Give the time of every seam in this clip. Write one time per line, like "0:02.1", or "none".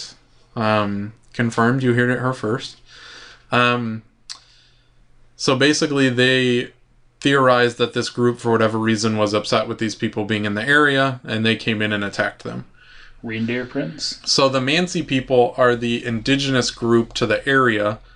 0:13.2
0:14.2